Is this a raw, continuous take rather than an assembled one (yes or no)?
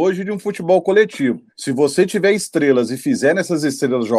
no